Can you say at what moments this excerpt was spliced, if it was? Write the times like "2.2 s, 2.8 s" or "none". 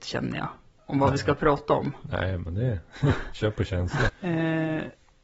4.1 s